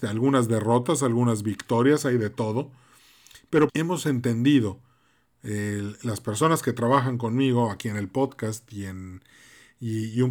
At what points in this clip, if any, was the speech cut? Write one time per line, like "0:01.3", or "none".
0:03.7